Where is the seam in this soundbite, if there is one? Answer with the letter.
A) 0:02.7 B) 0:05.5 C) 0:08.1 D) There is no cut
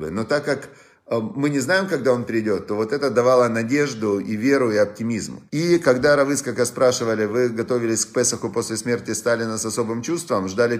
B